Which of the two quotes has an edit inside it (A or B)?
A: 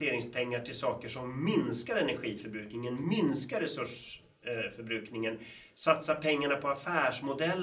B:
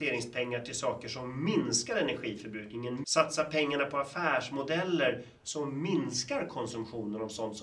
B